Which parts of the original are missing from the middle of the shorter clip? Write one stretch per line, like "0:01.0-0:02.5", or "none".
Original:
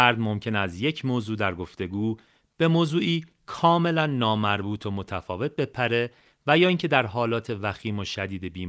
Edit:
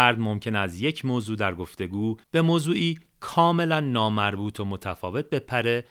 0:02.2-0:02.5